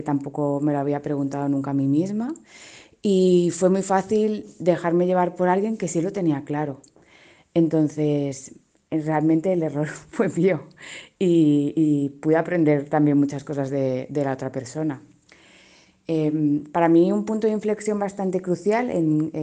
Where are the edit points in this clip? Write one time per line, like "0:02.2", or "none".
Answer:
none